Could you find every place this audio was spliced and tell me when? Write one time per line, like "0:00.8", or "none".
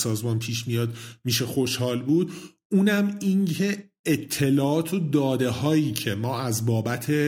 none